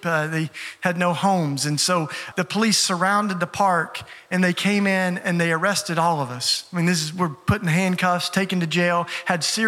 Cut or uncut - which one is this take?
cut